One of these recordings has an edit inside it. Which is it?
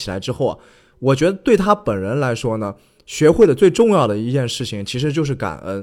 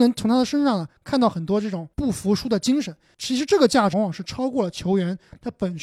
second; 1 cut; at 3.9 s

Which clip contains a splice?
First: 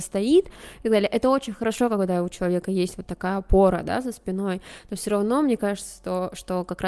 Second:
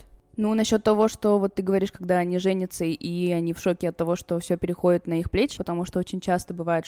second; 1 cut; at 5.6 s

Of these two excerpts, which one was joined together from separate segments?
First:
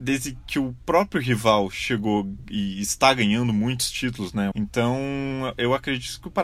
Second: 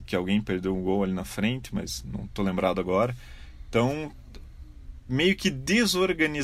first; 1 cut; at 4.5 s

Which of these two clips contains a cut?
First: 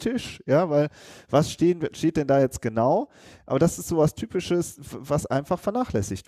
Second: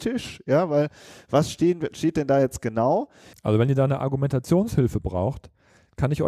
second; 1 cut; at 3.3 s

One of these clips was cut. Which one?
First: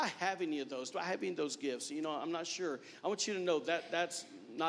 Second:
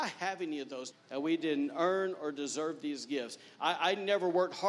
second; 1 cut; at 0.9 s

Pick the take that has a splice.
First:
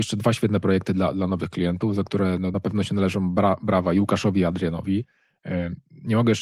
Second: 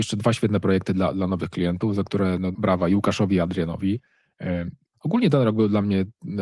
second; 2 cuts; at 2.5 s, 4.8 s

